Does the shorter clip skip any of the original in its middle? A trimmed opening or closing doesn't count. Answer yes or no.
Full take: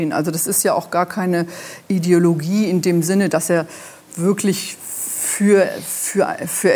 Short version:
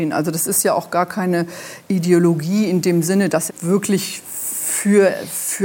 yes